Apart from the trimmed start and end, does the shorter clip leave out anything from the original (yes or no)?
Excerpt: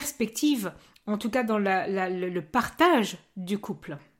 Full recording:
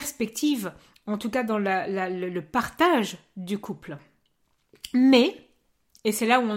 no